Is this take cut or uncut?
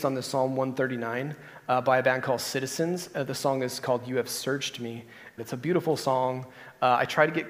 cut